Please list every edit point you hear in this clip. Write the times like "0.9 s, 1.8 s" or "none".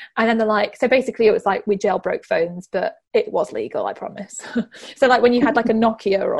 3.0 s